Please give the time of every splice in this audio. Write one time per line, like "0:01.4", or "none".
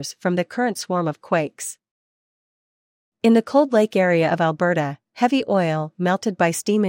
none